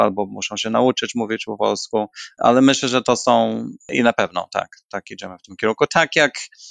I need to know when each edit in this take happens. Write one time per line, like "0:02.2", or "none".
none